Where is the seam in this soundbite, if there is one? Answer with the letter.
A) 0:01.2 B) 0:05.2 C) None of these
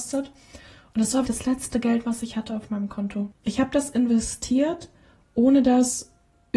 A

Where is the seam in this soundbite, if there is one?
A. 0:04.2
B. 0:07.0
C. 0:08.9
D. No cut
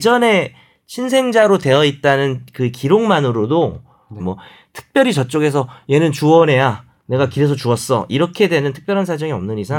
A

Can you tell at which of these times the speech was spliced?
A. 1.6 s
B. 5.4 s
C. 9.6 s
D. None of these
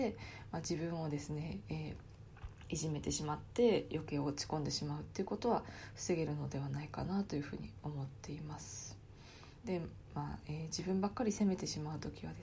C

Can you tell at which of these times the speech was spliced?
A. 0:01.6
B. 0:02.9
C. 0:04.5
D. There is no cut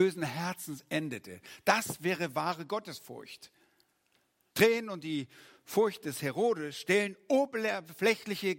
C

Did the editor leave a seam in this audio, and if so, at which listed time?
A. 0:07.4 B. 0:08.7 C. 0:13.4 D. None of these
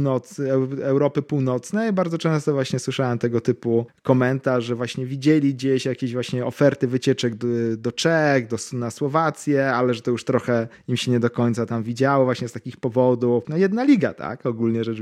C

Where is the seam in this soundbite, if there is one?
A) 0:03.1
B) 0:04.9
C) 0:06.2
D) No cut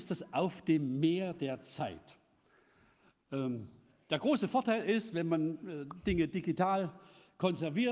D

